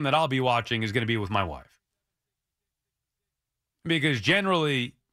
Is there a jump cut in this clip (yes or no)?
no